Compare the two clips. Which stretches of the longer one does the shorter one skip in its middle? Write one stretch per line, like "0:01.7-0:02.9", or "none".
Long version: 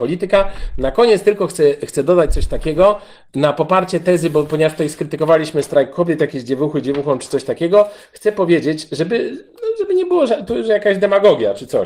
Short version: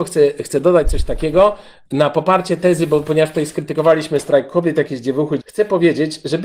0:06.8-0:08.1